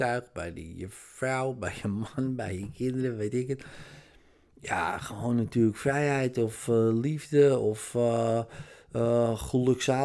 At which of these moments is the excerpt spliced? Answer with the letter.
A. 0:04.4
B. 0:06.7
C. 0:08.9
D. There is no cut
D